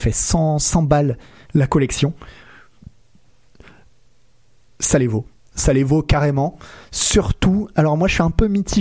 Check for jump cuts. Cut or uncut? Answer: uncut